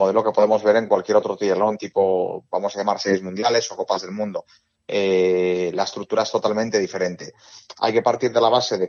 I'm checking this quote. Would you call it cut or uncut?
uncut